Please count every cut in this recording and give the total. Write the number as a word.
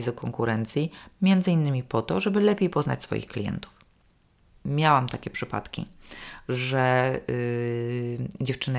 one